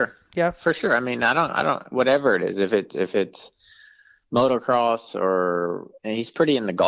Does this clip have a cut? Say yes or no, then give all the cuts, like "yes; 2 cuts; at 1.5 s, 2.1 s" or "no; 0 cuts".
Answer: no; 0 cuts